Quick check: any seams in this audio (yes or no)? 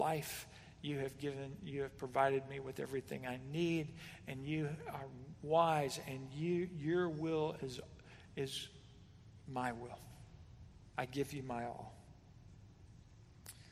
no